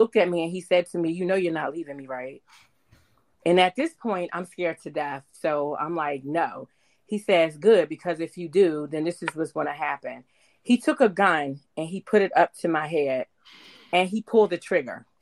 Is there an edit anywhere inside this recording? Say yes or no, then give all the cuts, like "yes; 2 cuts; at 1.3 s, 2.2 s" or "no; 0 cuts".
no; 0 cuts